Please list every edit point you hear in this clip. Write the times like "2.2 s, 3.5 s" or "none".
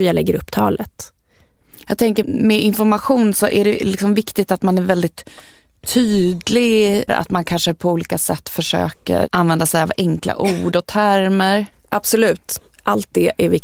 2.2 s, 7.1 s